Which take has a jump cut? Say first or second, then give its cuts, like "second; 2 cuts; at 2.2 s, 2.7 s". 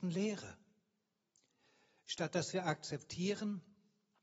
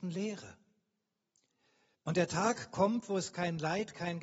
second; 1 cut; at 1.9 s